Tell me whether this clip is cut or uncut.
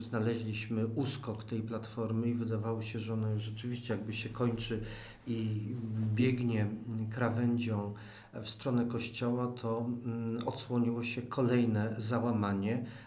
uncut